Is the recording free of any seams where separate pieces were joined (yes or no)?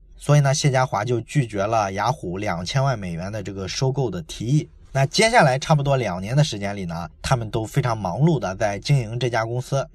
yes